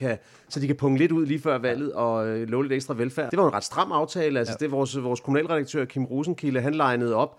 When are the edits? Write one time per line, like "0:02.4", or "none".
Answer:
0:03.3